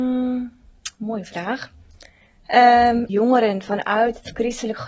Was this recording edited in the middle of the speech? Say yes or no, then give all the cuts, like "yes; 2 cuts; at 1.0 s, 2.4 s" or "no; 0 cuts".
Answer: yes; 1 cut; at 3.1 s